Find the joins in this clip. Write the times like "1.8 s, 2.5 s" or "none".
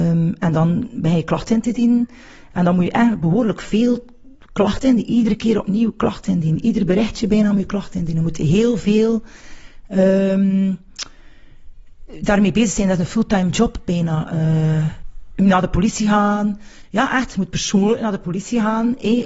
none